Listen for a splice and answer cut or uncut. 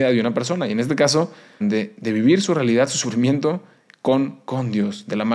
cut